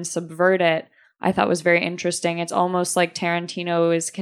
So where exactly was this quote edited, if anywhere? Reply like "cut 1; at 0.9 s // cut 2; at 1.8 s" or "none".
none